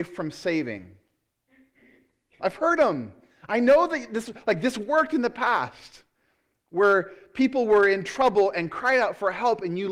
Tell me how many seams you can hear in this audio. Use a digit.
1